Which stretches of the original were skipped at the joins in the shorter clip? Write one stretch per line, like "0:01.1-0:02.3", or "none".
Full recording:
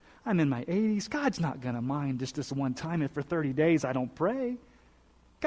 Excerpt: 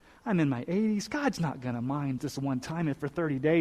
0:02.2-0:02.3

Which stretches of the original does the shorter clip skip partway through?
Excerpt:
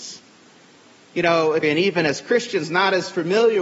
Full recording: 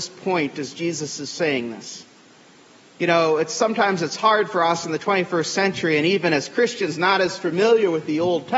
0:03.5-0:05.9

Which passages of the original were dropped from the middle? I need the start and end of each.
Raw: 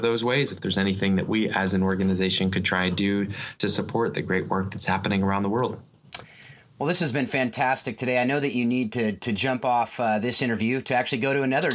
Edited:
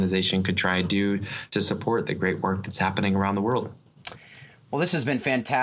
none

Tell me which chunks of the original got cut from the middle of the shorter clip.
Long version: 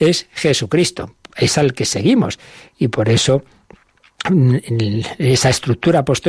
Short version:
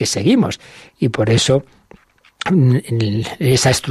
none

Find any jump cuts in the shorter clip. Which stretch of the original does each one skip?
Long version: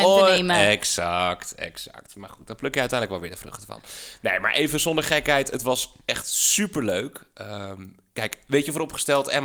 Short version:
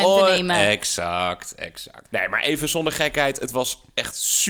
0:02.1-0:04.2

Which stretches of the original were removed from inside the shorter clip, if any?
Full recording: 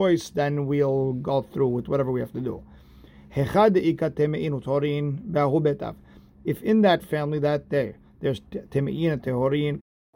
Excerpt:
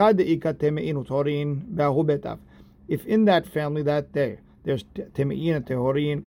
none

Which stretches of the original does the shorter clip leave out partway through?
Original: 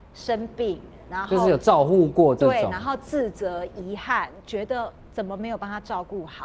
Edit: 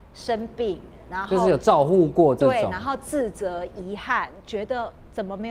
none

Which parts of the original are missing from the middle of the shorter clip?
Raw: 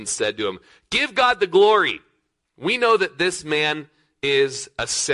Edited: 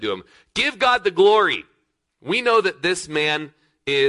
none

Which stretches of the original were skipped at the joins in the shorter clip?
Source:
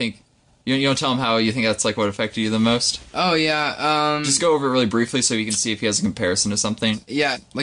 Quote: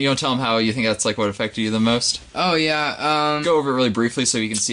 0:04.2-0:04.4

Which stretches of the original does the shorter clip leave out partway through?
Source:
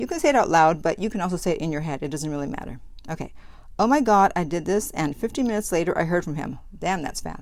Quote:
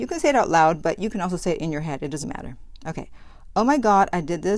0:02.2-0:02.5

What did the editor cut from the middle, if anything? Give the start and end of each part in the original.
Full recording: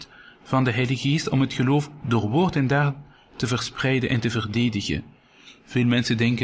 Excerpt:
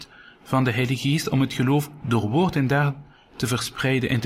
none

